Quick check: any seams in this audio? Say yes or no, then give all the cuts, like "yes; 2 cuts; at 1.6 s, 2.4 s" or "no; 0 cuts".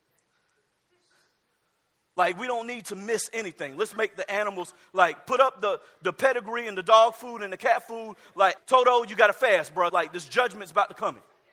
yes; 2 cuts; at 8.6 s, 9.9 s